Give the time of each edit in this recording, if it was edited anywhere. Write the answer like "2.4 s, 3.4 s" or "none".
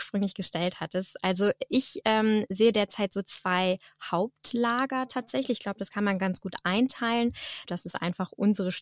7.6 s